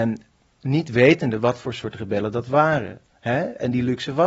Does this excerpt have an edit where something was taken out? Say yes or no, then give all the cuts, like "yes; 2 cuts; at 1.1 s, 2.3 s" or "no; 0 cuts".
no; 0 cuts